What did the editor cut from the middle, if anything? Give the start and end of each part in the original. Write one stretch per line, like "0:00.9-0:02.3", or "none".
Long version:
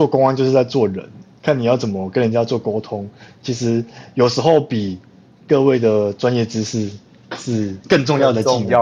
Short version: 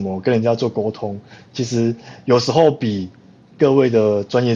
none